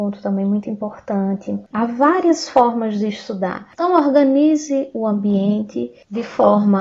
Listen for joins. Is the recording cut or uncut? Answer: cut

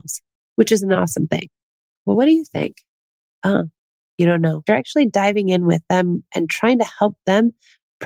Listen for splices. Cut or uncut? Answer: cut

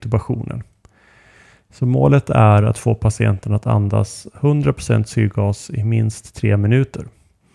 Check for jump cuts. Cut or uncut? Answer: uncut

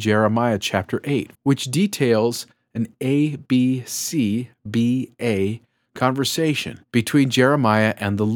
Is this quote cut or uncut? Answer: cut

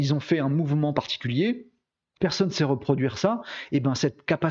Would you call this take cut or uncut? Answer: cut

